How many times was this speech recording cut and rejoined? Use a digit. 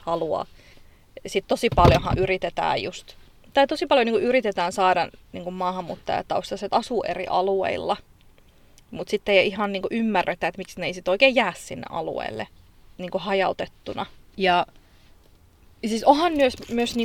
1